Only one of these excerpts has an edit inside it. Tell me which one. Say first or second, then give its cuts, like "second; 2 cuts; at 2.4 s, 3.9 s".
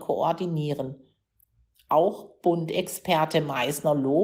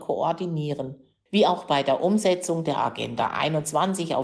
second; 1 cut; at 1.3 s